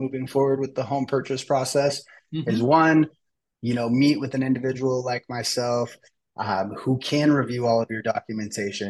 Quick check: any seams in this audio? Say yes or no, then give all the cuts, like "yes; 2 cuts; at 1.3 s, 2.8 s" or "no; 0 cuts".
no; 0 cuts